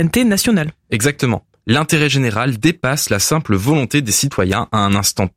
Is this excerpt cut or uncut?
uncut